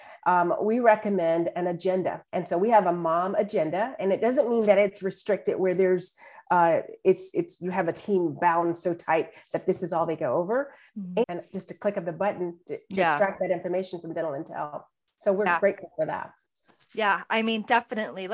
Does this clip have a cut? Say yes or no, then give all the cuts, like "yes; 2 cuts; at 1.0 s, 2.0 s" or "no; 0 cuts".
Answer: yes; 2 cuts; at 2.3 s, 11.2 s